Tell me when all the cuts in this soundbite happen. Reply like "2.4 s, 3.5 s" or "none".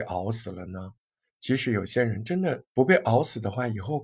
2.7 s